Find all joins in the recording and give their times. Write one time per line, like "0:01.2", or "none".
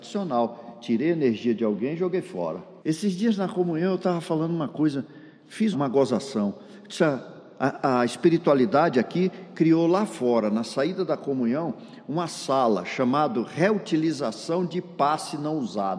0:02.8
0:05.7